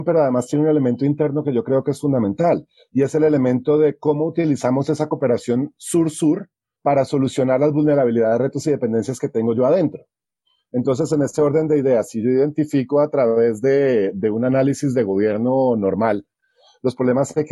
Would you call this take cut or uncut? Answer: cut